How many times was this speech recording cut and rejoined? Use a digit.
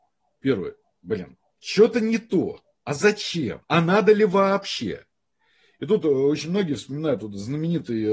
1